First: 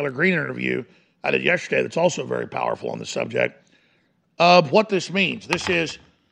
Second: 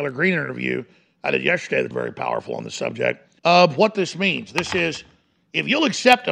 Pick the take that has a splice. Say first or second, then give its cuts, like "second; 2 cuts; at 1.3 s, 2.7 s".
second; 2 cuts; at 1.9 s, 3.4 s